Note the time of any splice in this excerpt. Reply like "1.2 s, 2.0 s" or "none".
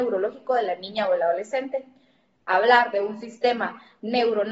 2.4 s